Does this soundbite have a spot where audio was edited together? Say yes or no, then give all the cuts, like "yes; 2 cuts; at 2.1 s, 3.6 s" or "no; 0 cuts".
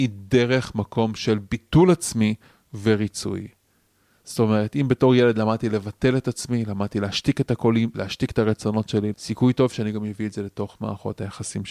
yes; 2 cuts; at 7.9 s, 9.1 s